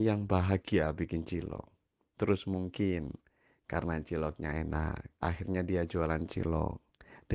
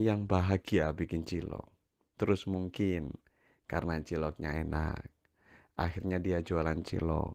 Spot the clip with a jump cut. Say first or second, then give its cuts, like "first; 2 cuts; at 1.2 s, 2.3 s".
first; 1 cut; at 5.1 s